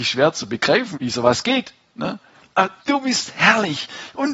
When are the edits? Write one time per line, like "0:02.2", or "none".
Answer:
0:00.9
0:02.8

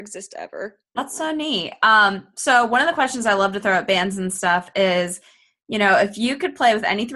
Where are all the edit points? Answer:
0:01.0

